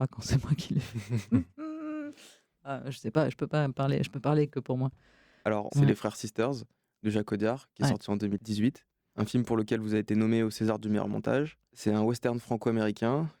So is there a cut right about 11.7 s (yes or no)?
yes